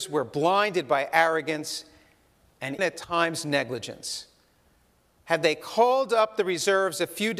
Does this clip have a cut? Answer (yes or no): yes